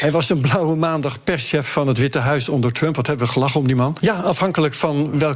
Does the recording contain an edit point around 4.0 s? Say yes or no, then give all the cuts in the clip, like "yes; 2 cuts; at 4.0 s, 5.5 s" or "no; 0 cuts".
yes; 1 cut; at 4.0 s